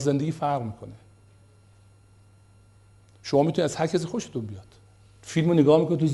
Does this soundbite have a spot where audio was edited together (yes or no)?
no